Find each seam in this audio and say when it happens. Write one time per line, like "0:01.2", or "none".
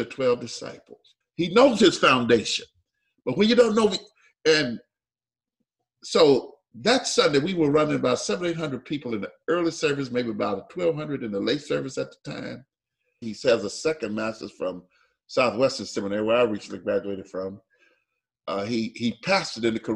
0:01.2
0:13.2

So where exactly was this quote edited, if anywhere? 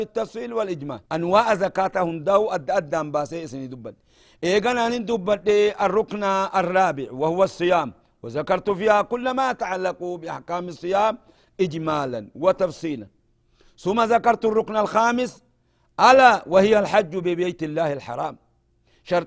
0:01.1

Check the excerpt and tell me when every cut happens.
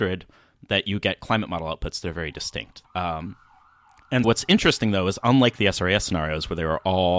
0:02.8
0:04.2

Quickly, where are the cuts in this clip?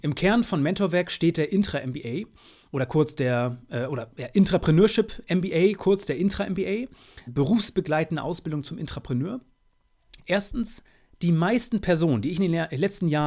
0:07.3
0:10.2

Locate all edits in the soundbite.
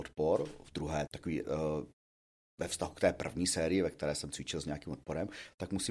0:01.1

